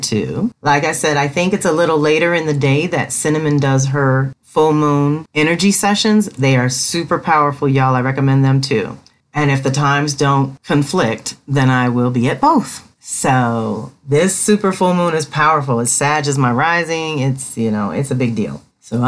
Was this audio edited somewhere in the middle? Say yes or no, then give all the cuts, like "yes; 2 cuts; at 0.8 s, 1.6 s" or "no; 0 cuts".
no; 0 cuts